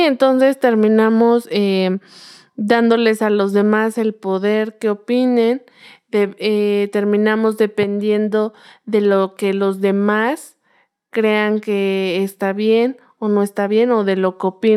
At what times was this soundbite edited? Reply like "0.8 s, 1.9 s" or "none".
none